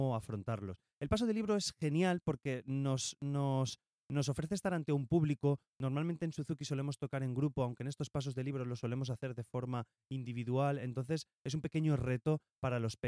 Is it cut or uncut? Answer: uncut